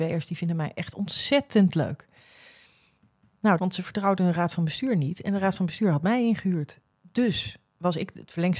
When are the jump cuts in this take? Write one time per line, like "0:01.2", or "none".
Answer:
0:03.6